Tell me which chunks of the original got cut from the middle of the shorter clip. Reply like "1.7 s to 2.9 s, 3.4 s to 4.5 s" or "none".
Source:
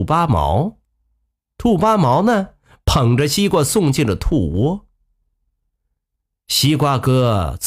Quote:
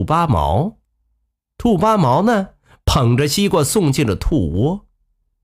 none